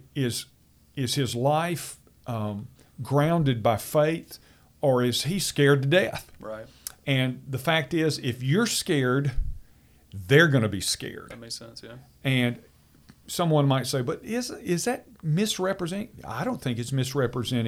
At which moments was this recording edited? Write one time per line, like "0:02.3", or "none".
none